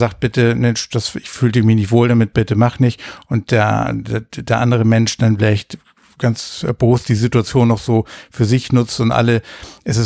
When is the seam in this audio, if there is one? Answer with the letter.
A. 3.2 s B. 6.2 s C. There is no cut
B